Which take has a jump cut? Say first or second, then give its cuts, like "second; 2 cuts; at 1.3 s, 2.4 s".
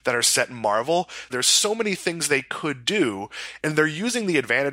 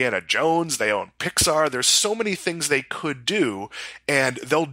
first; 2 cuts; at 1.3 s, 3.6 s